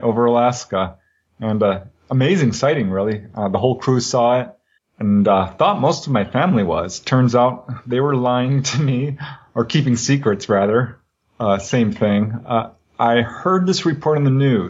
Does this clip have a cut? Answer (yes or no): yes